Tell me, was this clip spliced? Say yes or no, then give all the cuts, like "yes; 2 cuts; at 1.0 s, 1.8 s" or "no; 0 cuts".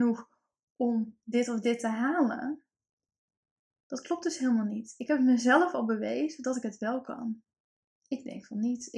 yes; 1 cut; at 7.9 s